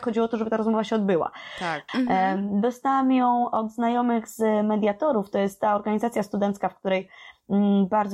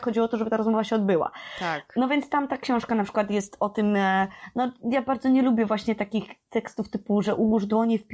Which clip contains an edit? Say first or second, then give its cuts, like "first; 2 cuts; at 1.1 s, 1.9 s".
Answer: first; 1 cut; at 1.9 s